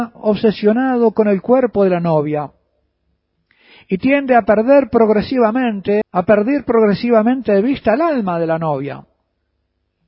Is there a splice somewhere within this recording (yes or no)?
yes